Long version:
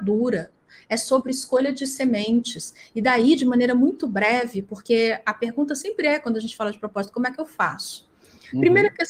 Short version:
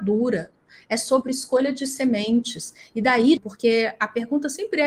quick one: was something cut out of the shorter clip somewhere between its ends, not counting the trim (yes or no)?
yes